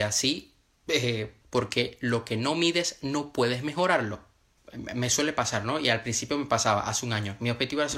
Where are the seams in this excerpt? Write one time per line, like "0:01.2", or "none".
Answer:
0:01.4
0:04.6